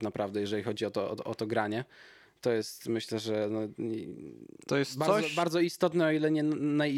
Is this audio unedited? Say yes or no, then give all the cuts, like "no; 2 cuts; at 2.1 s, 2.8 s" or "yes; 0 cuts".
yes; 0 cuts